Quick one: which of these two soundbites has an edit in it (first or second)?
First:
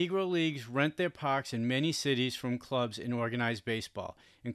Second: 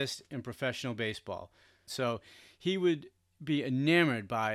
second